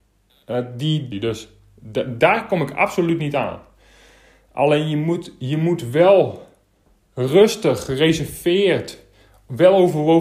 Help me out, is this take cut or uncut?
cut